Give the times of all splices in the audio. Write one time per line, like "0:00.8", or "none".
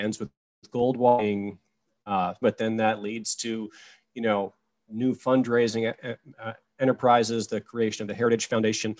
0:02.4